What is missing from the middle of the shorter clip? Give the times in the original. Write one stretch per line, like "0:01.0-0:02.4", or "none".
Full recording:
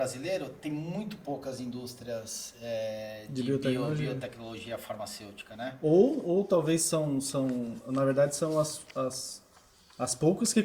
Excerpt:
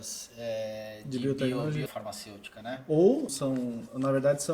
0:04.1-0:04.8
0:06.2-0:07.2